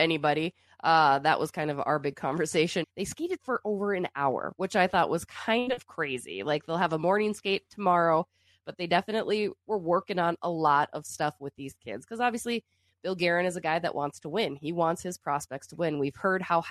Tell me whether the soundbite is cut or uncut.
cut